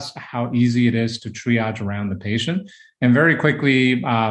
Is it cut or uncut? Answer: uncut